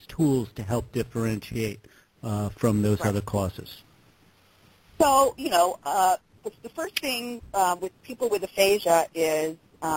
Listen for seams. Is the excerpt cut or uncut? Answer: uncut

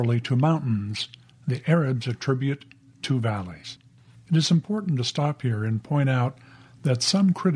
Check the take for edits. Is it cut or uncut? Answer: cut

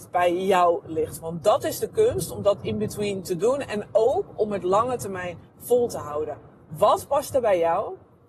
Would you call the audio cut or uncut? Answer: uncut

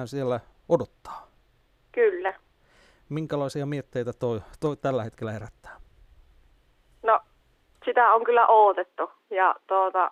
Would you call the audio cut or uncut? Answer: uncut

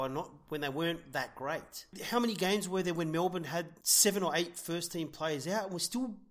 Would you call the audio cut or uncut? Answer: uncut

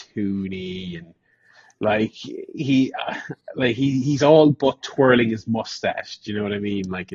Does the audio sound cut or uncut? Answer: uncut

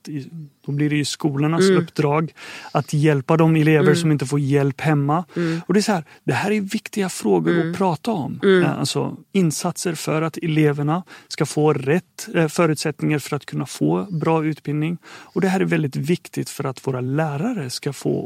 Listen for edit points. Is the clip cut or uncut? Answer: uncut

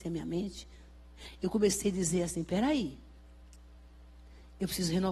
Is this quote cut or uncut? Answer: uncut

